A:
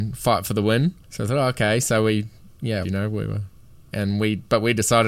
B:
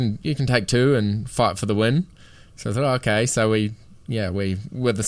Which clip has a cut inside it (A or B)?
A